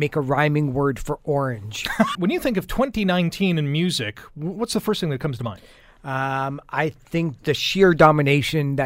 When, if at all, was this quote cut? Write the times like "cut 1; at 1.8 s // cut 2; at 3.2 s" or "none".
cut 1; at 2.1 s // cut 2; at 7.4 s